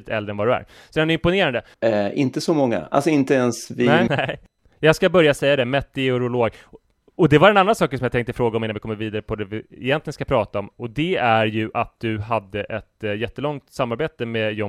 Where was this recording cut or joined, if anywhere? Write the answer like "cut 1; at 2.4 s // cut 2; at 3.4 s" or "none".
cut 1; at 1.7 s // cut 2; at 4.1 s